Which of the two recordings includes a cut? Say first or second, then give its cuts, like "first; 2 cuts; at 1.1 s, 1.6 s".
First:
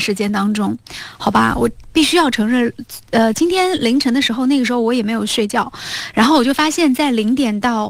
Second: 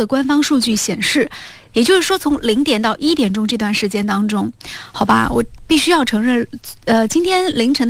second; 1 cut; at 1.7 s